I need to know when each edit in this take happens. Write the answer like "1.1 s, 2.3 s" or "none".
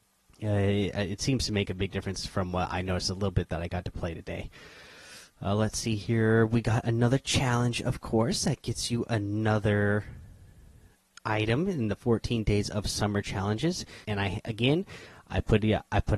14.0 s

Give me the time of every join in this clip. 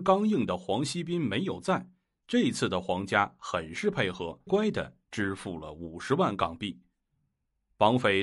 4.5 s

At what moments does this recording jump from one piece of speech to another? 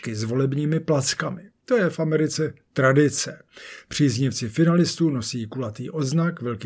none

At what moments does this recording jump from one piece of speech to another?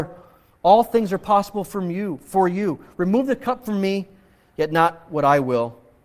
none

